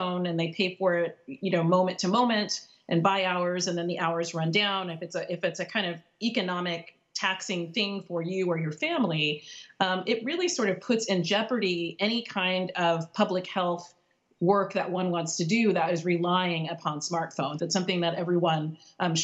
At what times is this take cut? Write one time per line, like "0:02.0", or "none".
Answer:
0:17.6